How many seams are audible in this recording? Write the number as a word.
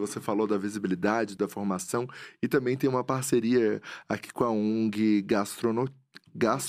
one